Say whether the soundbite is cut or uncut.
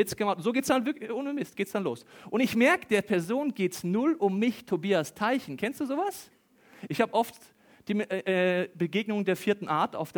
cut